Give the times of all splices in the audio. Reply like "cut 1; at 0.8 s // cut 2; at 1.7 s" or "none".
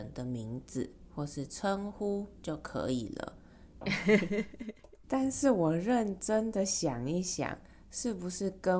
cut 1; at 3.8 s // cut 2; at 5.0 s